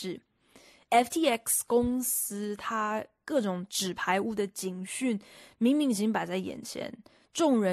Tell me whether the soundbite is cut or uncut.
uncut